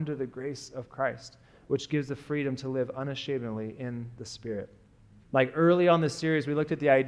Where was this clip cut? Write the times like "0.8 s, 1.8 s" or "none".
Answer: 5.2 s